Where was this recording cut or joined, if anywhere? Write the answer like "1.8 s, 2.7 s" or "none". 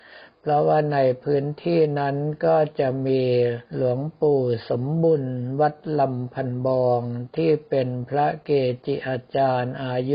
3.7 s